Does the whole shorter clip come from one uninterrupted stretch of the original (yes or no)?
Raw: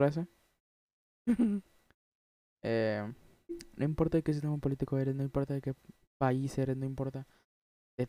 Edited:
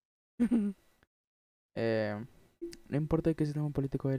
yes